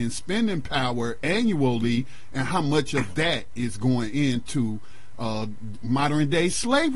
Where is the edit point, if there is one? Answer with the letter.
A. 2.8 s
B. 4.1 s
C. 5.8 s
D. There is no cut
C